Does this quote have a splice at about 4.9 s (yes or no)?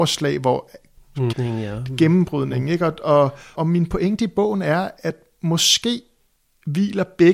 no